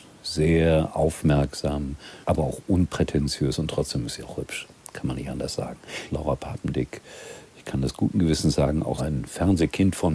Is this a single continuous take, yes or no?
no